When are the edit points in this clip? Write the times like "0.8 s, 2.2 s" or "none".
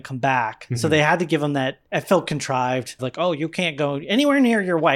1.9 s, 3.0 s